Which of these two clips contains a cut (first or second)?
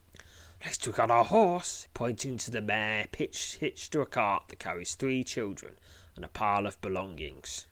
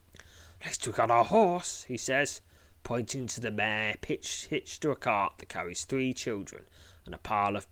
first